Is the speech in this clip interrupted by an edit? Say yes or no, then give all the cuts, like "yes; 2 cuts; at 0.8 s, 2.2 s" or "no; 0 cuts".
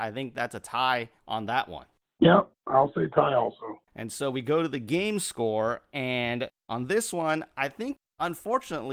no; 0 cuts